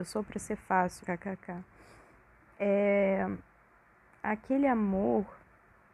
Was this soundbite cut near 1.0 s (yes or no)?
yes